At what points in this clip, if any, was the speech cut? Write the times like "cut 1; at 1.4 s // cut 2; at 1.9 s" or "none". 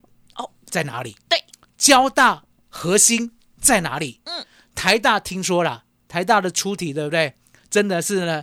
none